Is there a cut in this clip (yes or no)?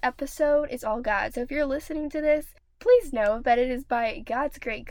no